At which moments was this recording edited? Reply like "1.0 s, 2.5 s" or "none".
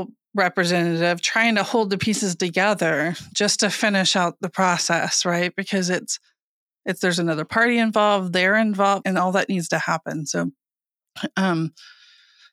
9.0 s